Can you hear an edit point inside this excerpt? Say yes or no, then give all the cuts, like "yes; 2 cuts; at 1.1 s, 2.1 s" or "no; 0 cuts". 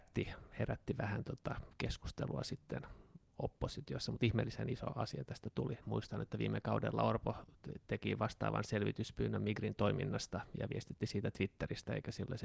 yes; 1 cut; at 5.8 s